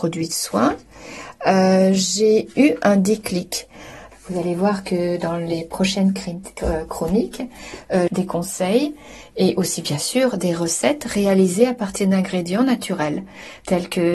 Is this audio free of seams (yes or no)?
no